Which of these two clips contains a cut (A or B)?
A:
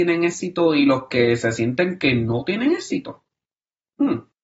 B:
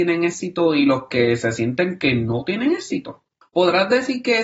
B